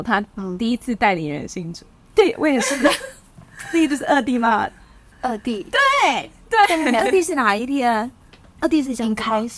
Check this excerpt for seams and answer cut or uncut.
cut